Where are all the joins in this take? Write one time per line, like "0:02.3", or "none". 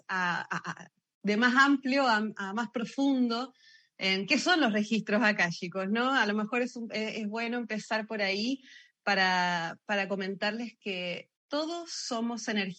0:11.4

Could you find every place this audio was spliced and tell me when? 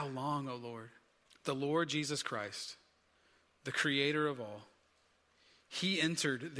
0:01.3

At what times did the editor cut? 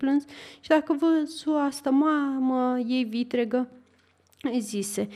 none

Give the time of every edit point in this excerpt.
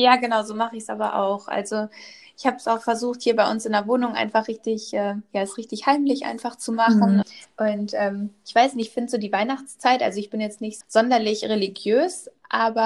0:07.2
0:10.8

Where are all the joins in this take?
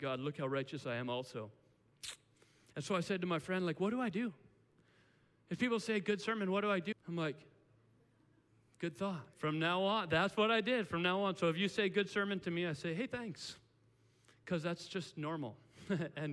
0:06.9
0:09.3

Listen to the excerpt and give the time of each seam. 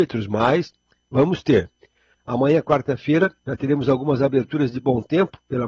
0:02.1
0:03.4

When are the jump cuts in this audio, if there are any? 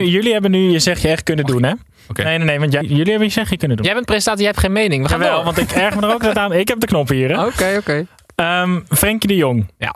0:02.8

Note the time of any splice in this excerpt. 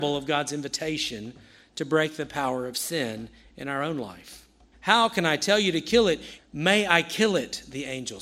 0:04.7
0:06.4

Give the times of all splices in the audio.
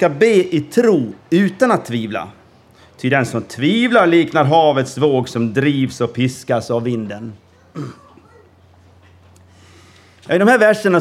none

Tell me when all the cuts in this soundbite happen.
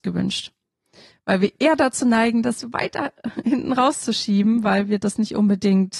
0:01.1

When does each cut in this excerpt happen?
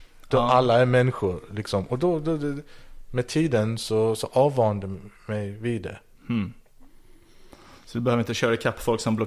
none

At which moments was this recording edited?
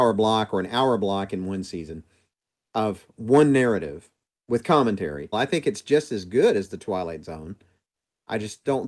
0:05.3

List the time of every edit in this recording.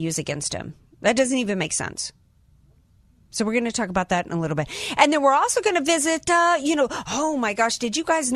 none

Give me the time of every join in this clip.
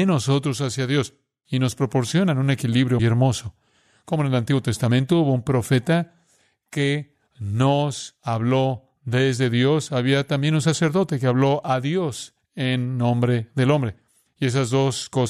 0:03.0

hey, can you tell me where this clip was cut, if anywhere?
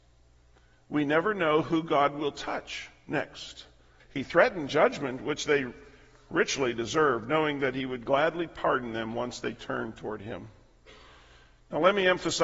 0:04.0

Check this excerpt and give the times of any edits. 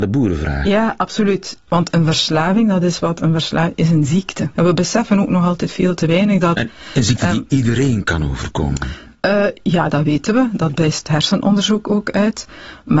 0:01.7
0:04.5
0:09.9

